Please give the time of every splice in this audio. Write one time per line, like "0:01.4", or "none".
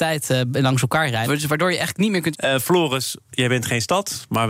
0:01.2
0:02.3